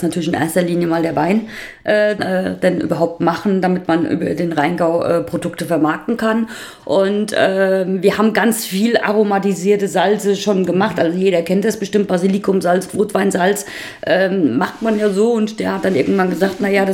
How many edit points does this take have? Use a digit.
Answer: 2